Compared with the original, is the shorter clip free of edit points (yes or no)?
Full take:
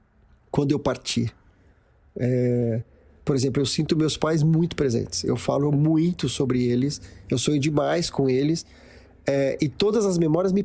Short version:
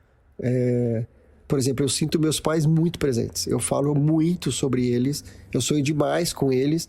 yes